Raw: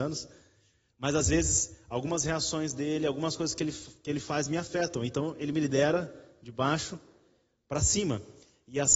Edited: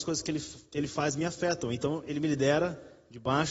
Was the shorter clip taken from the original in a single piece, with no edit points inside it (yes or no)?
yes